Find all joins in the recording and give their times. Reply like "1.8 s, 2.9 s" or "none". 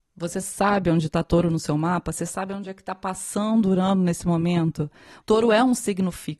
5.2 s

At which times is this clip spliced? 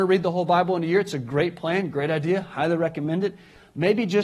none

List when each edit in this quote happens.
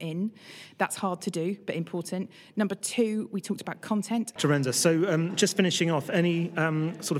4.4 s

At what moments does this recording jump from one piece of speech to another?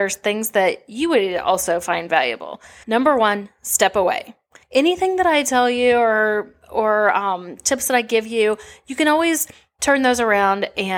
2.8 s, 4.6 s

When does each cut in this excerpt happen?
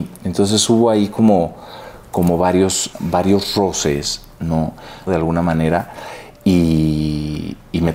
2.9 s, 5.1 s

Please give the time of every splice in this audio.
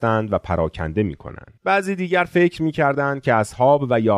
1.6 s

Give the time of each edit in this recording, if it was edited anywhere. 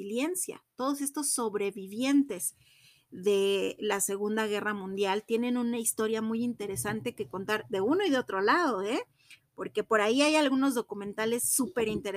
none

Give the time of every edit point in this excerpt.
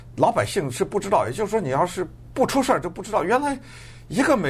none

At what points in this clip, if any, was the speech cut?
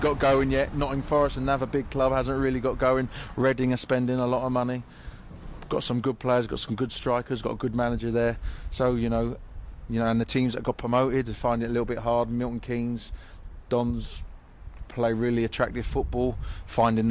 none

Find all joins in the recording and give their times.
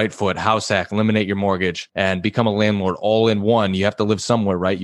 none

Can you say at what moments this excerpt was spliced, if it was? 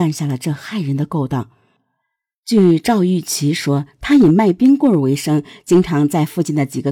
none

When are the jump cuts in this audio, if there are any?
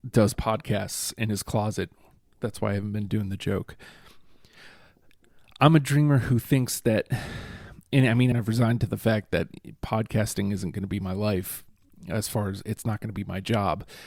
2.4 s, 8.3 s

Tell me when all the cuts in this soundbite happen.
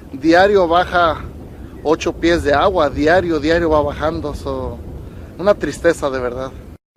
none

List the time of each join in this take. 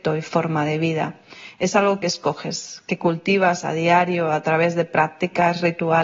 none

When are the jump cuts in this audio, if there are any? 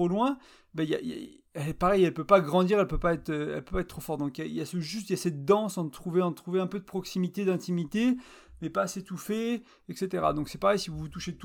none

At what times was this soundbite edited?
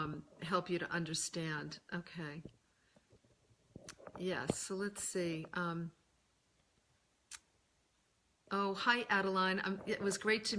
none

